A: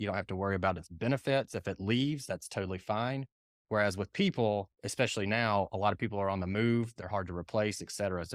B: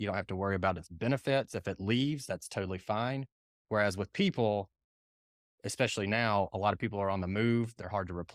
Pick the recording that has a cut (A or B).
A